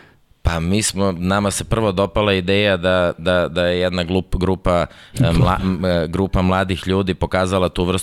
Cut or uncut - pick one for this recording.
uncut